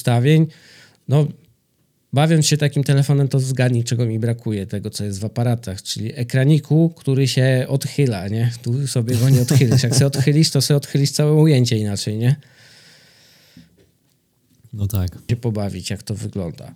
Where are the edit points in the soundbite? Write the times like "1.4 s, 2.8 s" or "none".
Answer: 15.3 s